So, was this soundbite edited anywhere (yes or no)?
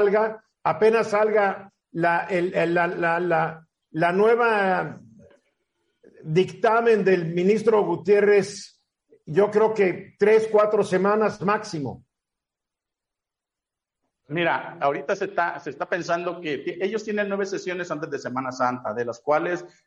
no